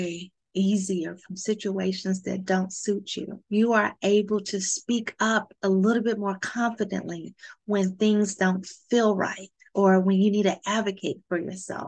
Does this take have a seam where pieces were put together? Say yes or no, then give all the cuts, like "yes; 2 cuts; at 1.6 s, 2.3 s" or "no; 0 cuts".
yes; 1 cut; at 3.4 s